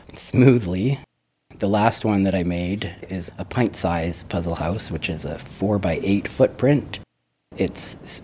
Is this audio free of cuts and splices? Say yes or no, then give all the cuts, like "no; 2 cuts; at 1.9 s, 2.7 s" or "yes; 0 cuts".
yes; 0 cuts